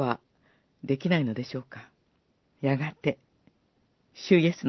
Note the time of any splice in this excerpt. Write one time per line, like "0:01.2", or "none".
0:02.5